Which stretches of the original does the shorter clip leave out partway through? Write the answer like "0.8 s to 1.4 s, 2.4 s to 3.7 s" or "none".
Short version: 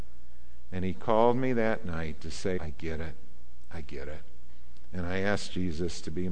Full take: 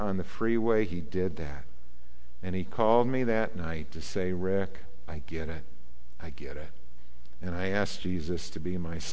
4.3 s to 5.1 s